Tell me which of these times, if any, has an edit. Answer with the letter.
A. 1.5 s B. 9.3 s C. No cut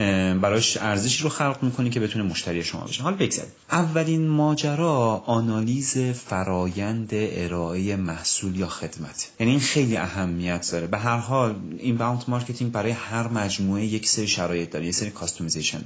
B